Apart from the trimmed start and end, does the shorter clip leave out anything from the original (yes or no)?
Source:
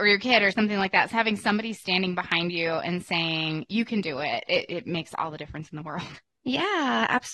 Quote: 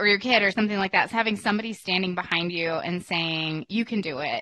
no